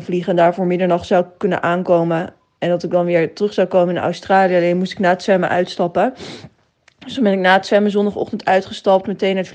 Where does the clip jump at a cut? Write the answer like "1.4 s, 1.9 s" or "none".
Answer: none